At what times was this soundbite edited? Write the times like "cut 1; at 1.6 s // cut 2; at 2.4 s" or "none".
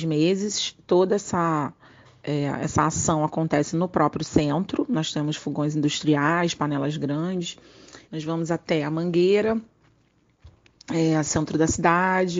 cut 1; at 8.0 s